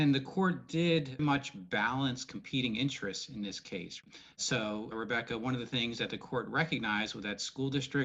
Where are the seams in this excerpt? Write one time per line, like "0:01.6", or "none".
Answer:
0:01.2